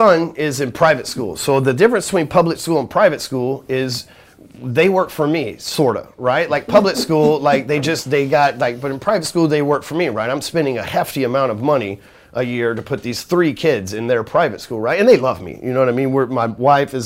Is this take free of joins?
yes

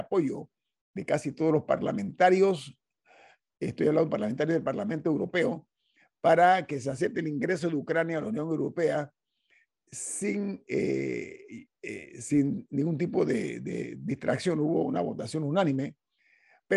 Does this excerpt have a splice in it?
no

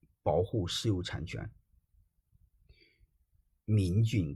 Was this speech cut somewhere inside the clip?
no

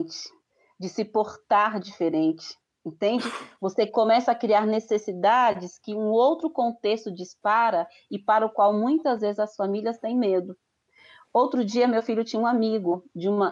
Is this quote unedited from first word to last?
yes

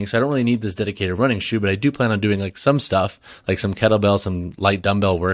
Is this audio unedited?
yes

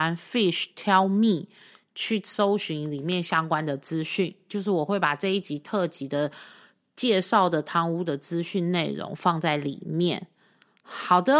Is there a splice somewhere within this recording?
no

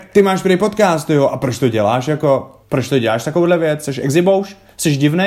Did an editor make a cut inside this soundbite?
yes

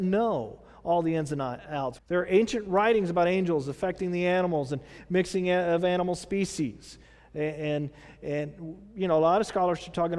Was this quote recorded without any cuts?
no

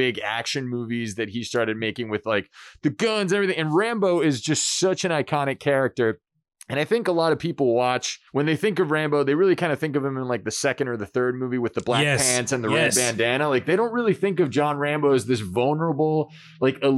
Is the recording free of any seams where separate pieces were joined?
no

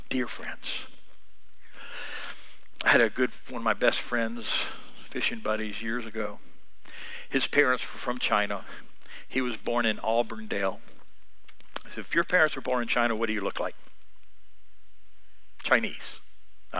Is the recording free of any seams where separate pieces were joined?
yes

